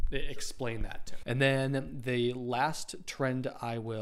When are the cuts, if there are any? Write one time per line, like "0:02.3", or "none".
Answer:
0:01.2